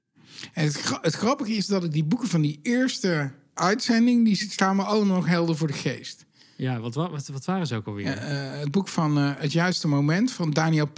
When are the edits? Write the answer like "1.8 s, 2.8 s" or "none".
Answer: none